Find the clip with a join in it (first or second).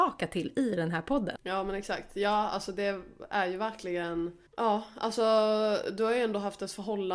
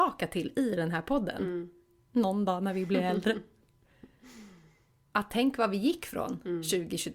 first